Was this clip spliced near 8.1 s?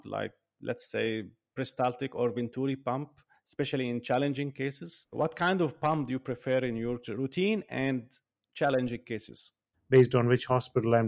no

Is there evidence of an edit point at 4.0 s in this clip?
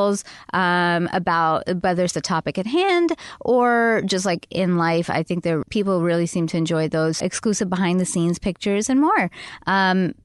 no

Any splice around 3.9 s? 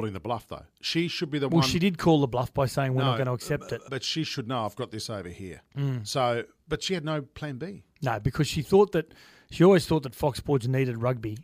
yes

